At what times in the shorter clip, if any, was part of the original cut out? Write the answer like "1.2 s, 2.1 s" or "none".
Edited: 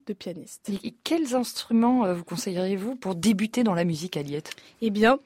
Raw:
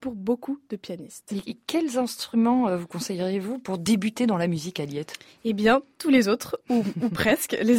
none

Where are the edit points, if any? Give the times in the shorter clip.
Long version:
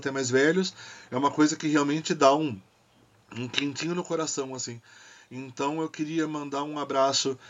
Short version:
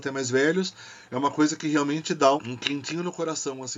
2.4 s

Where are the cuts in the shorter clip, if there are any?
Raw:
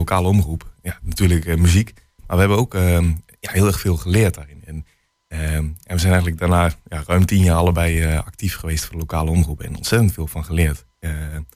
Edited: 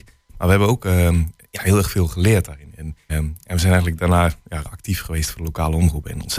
3.1 s, 4.6 s

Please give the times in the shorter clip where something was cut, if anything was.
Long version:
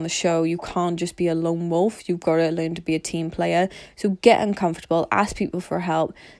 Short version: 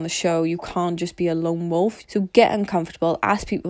2.0 s

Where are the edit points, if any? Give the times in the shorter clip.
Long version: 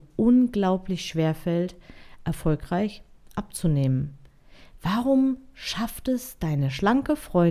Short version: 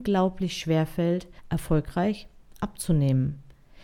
1.4 s

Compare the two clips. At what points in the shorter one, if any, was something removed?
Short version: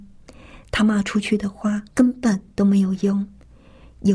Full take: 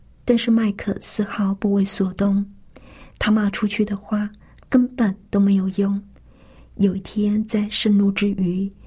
1.9 s

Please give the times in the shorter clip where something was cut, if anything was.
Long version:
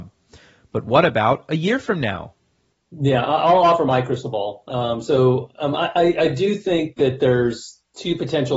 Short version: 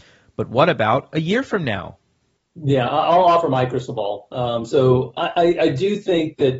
5.2 s

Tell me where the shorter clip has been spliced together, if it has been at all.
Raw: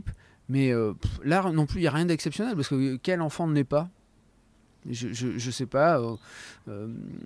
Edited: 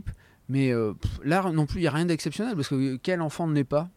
none

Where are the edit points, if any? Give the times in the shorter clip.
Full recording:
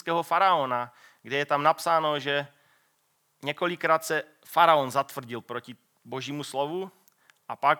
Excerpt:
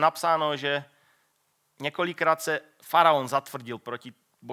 none

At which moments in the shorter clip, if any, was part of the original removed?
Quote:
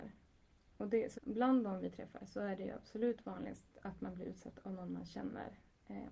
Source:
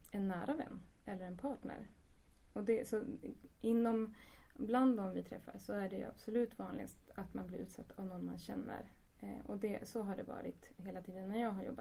1.1 s

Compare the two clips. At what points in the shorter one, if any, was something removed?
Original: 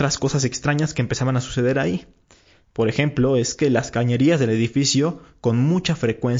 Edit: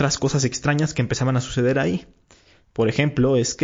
none

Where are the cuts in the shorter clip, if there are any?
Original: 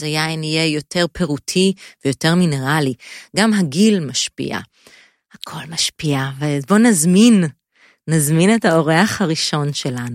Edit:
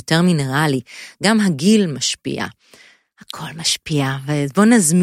none

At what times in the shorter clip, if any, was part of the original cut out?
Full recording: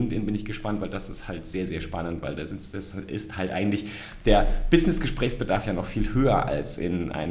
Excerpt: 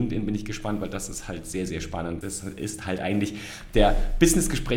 2.2 s

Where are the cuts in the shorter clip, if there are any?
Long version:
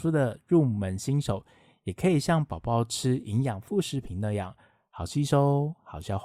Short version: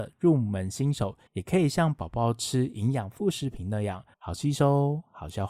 1.3 s, 4.1 s

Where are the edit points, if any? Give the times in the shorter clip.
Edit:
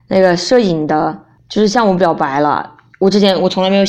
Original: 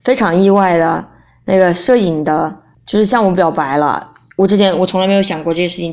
none

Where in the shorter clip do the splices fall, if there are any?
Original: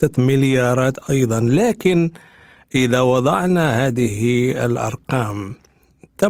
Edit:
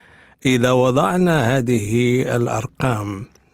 none

